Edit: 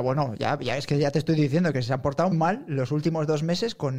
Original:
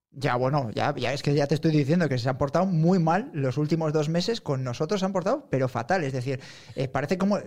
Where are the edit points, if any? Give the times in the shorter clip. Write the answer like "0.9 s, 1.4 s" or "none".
2.3 s